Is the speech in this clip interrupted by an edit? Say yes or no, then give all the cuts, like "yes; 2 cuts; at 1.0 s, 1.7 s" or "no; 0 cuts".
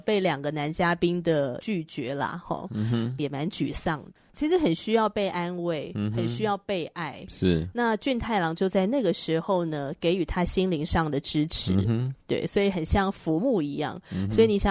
yes; 1 cut; at 3.2 s